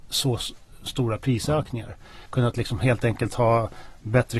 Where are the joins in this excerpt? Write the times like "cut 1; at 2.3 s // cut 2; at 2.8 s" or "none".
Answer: cut 1; at 2.3 s